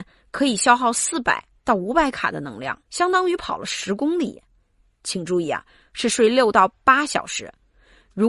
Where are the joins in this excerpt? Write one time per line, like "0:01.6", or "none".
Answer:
0:02.8